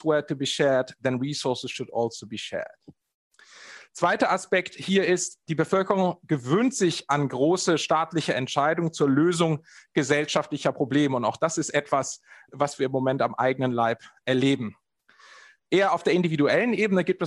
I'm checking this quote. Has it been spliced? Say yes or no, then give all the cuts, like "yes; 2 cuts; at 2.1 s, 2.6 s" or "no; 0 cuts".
yes; 1 cut; at 15.6 s